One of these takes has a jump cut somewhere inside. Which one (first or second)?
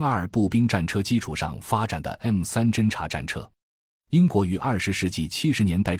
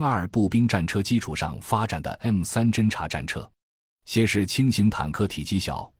second